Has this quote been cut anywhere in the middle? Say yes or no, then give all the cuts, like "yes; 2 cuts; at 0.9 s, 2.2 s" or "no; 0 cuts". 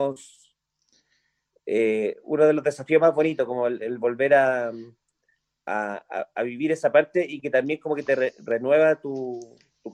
no; 0 cuts